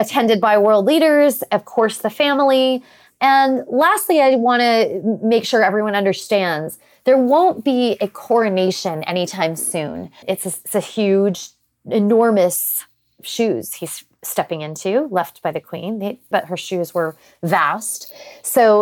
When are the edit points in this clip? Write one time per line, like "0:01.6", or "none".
0:10.2
0:16.3